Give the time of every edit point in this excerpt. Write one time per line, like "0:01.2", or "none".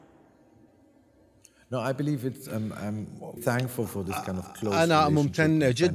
0:03.4